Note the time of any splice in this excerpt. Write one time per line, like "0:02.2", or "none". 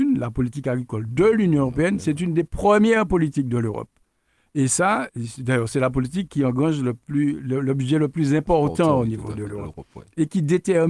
none